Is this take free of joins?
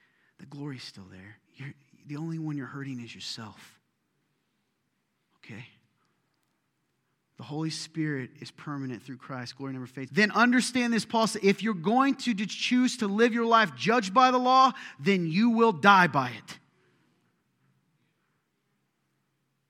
no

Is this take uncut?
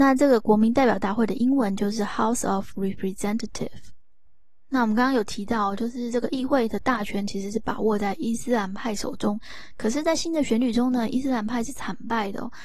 yes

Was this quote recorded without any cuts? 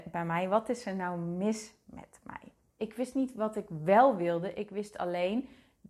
no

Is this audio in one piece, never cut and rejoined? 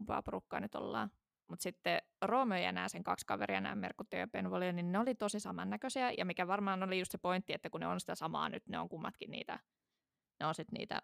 yes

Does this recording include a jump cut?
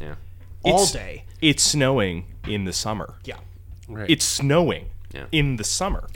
no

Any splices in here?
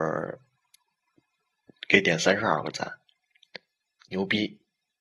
no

